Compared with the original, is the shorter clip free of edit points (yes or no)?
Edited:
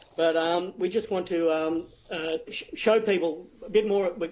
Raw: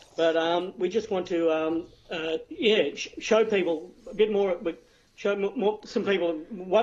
no